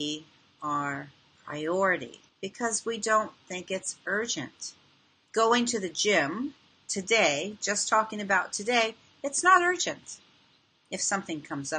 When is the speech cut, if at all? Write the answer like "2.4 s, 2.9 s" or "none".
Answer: 2.3 s, 5.3 s